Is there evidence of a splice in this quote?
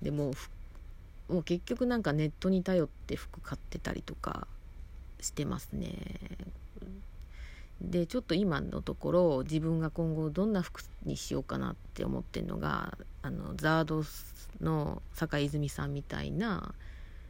no; 0 cuts

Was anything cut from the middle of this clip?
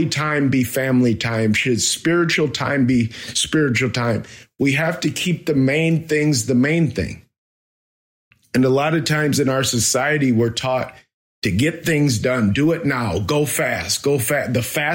no; 0 cuts

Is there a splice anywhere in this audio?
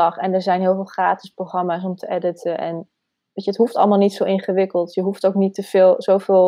no; 0 cuts

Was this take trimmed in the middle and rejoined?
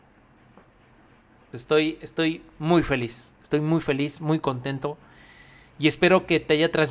yes; 1 cut; at 1.5 s

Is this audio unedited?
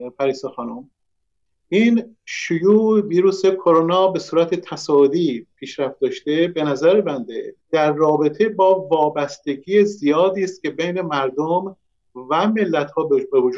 no; 1 cut; at 7.6 s

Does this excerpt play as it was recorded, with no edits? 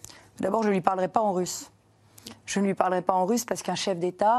yes; 0 cuts

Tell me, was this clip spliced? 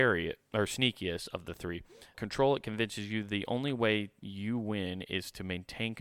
yes; 1 cut; at 2.1 s

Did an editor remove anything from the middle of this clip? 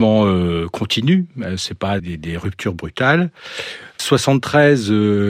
yes; 1 cut; at 2.0 s

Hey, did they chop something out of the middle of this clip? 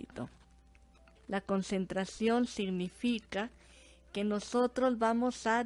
yes; 1 cut; at 1.2 s

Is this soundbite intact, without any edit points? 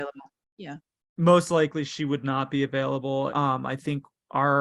no; 1 cut; at 3.3 s

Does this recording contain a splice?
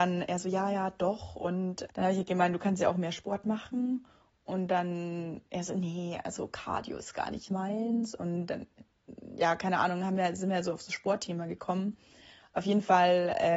no; 0 cuts

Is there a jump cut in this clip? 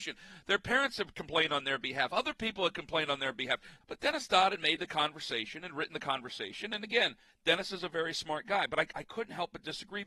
yes; 1 cut; at 3.8 s

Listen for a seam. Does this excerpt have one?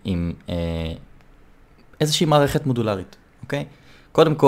no; 0 cuts

